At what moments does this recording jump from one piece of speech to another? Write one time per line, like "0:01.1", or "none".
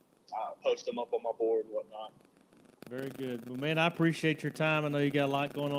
0:02.7